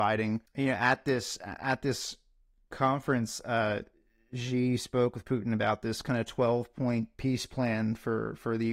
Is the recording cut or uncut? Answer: uncut